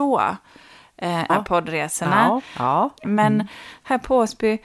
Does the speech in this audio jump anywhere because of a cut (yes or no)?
yes